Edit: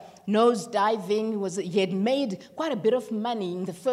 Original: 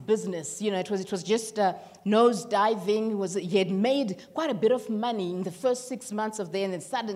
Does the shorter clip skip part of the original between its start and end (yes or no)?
no